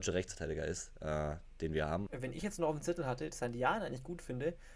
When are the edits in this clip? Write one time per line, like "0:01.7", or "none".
0:02.1
0:03.3